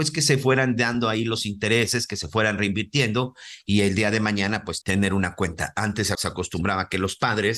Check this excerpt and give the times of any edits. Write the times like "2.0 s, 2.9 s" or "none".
4.8 s, 6.1 s